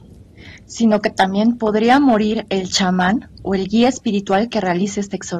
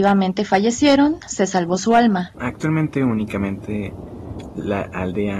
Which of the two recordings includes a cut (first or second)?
second